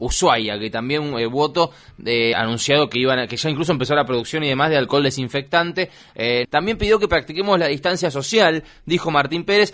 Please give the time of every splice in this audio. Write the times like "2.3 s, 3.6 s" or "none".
2.3 s, 6.4 s